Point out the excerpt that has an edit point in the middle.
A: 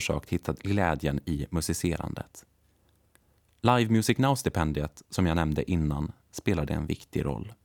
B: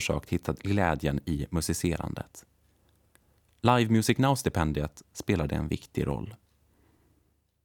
B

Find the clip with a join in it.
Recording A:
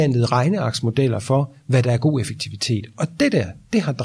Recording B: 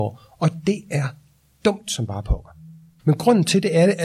B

